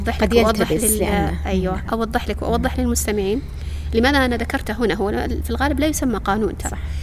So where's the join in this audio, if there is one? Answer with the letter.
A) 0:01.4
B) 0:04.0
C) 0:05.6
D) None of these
D